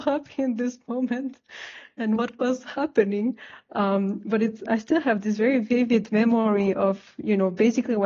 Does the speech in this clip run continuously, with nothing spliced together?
no; 1 cut; at 4.7 s

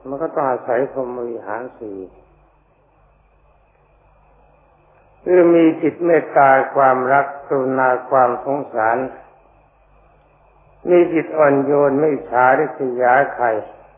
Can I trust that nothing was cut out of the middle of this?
yes; 0 cuts

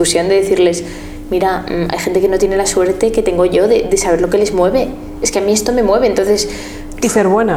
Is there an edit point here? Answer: no; 0 cuts

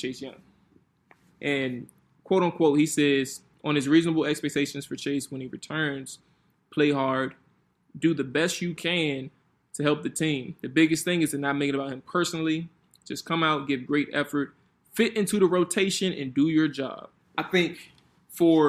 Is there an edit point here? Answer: yes; 1 cut; at 17.2 s

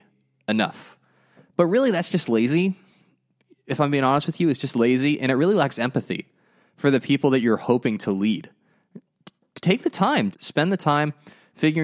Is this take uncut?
no; 1 cut; at 10.3 s

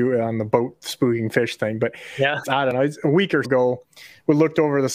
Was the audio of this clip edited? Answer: yes; 2 cuts; at 2.4 s, 3.4 s

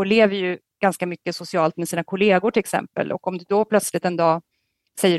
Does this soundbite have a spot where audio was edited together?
no; 0 cuts

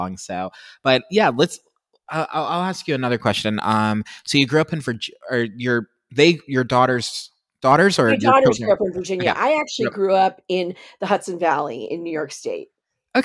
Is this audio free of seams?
yes; 0 cuts

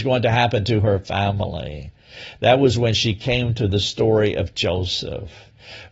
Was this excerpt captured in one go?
yes; 0 cuts

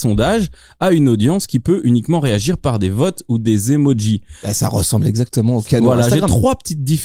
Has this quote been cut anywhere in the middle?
no; 0 cuts

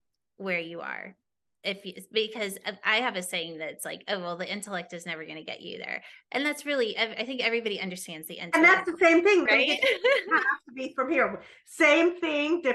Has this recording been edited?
yes; 1 cut; at 9.5 s

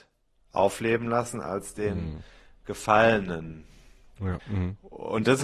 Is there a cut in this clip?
yes; 1 cut; at 4.4 s

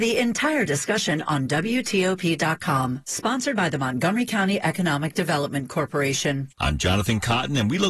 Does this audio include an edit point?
yes; 2 cuts; at 3.0 s, 6.5 s

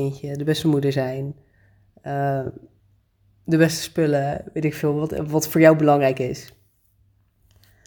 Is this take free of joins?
yes; 0 cuts

